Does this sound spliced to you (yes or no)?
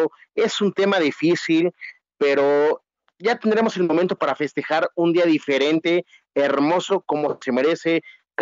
no